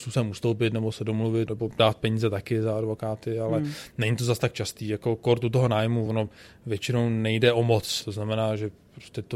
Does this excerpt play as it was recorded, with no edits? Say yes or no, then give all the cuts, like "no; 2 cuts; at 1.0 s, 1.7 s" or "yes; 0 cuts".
yes; 0 cuts